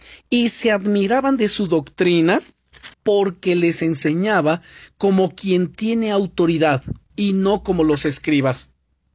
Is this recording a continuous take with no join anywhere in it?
no; 2 cuts; at 2.9 s, 7.0 s

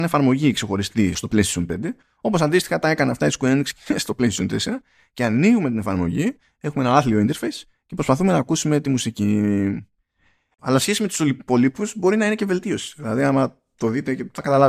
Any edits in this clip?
yes; 2 cuts; at 1.1 s, 10.6 s

